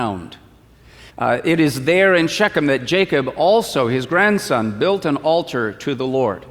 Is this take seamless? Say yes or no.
no